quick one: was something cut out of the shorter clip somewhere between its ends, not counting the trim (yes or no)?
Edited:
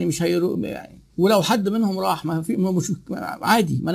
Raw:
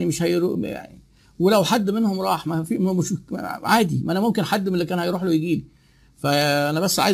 yes